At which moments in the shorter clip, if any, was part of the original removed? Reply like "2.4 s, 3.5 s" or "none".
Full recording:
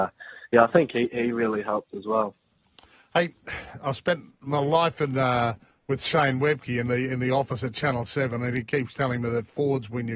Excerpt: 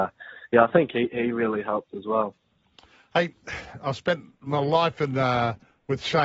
none